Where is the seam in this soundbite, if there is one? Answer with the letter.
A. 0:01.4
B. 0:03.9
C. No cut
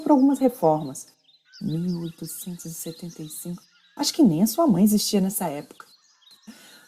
A